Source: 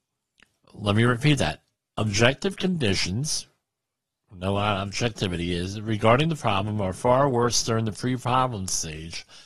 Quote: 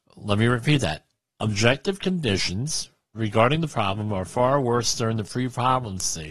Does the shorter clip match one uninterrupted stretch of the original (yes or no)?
no